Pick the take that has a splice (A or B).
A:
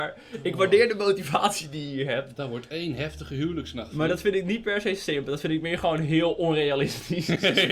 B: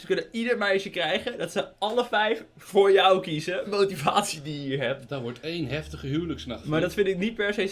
B